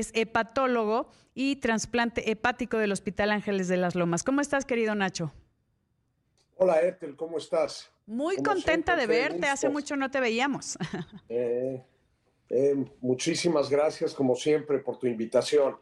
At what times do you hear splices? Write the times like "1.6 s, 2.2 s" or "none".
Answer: none